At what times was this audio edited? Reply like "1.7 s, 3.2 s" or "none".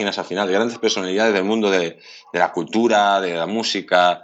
none